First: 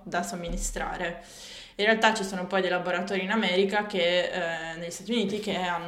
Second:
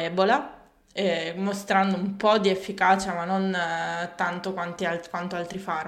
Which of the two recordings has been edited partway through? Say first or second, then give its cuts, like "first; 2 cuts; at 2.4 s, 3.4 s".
first; 1 cut; at 1.7 s